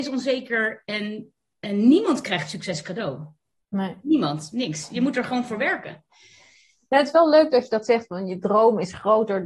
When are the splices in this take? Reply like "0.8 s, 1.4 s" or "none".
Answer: none